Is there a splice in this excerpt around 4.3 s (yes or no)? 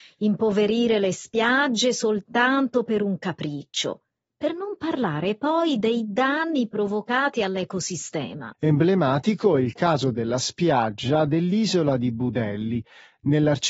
no